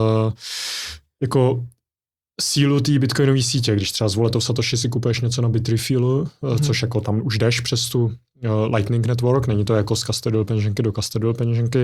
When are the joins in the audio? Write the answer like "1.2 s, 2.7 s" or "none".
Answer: none